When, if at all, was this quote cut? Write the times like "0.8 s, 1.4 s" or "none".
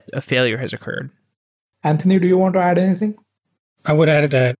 1.7 s

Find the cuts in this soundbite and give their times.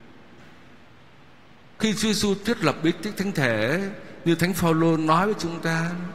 none

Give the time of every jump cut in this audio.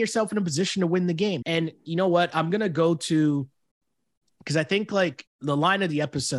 1.4 s, 5.3 s

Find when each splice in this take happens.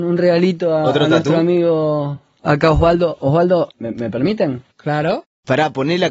3.7 s

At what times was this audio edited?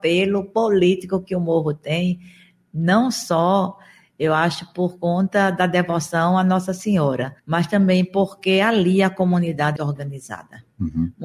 7.4 s, 9.8 s

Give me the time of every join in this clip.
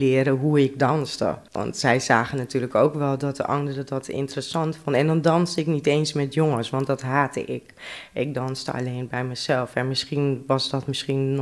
1.5 s

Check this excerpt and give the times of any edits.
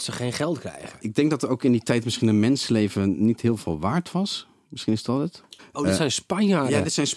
5.6 s

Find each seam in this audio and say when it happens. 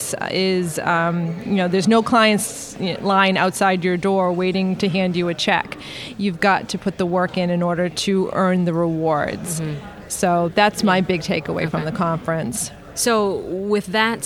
none

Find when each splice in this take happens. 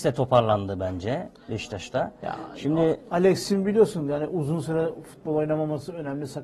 none

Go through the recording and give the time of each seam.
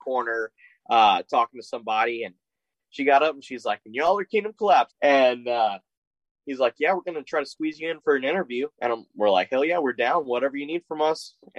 4.9 s, 8.7 s

